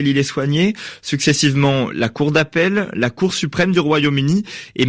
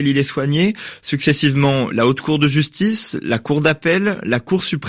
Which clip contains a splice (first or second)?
first